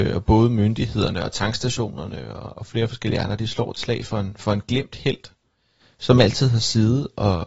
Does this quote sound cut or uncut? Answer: uncut